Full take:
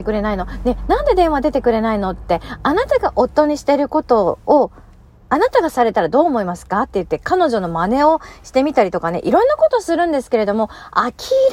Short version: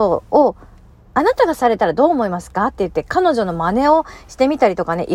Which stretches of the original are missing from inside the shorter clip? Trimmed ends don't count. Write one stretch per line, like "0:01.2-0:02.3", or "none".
none